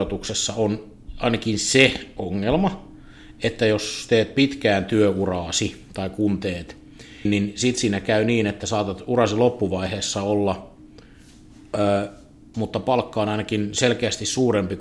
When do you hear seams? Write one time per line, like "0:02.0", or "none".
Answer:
0:07.2
0:12.5